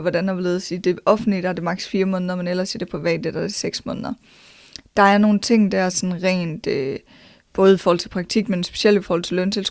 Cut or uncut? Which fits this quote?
cut